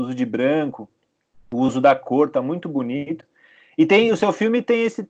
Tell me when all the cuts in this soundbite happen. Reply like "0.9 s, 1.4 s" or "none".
none

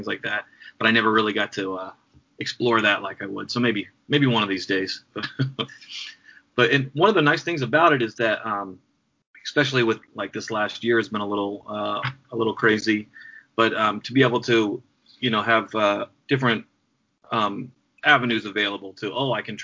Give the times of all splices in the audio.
none

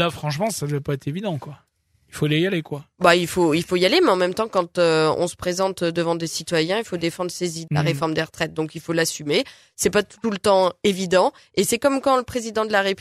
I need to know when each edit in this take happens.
7.7 s

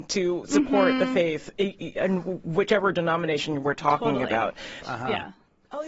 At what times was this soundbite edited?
4.8 s

